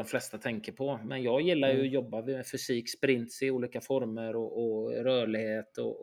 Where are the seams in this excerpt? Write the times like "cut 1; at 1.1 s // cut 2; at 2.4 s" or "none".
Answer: none